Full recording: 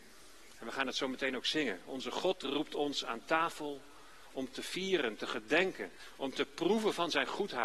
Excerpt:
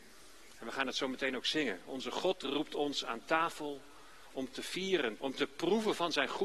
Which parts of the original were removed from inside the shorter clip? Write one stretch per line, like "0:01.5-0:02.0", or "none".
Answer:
0:05.2-0:06.2